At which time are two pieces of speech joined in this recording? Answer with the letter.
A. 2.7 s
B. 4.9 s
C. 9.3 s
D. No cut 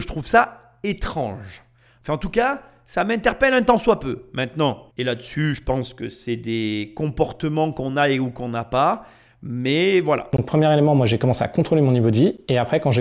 B